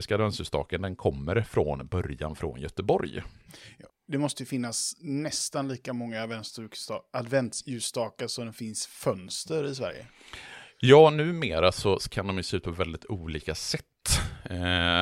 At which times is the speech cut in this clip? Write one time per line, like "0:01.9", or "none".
0:03.9

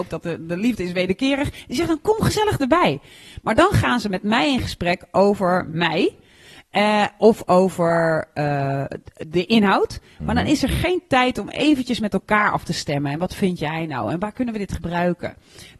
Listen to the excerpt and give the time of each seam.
none

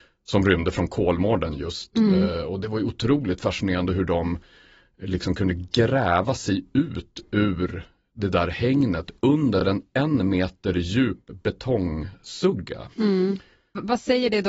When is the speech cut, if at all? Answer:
none

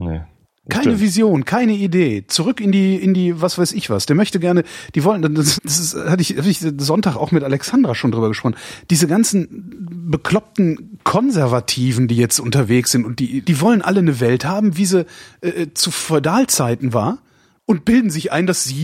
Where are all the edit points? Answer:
0:05.6
0:13.4

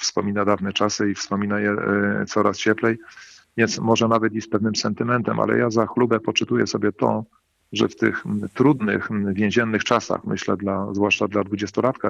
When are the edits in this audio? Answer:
none

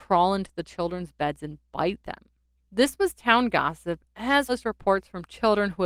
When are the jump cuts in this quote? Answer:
0:02.6
0:04.5

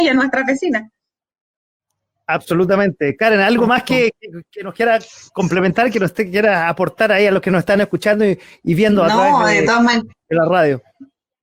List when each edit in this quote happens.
none

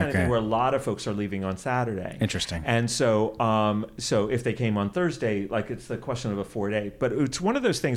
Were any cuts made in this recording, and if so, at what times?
none

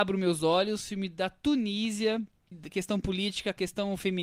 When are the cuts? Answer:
0:02.5

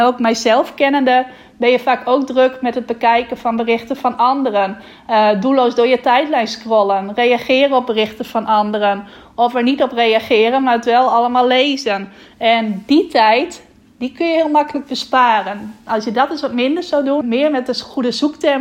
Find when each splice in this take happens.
0:17.2

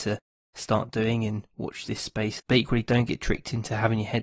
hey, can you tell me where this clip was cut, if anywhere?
0:02.4

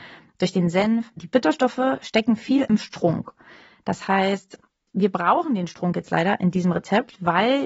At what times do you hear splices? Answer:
0:01.2

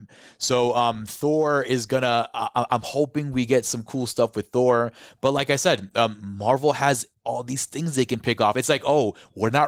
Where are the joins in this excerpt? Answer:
none

